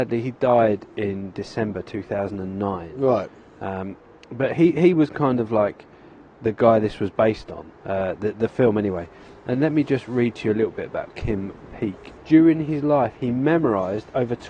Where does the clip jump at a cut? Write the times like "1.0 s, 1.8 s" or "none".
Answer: 7.8 s, 12.2 s